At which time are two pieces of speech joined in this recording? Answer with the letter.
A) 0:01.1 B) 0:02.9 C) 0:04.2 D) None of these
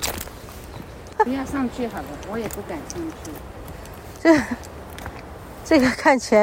A